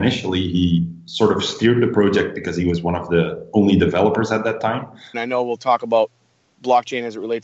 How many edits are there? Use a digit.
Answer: 1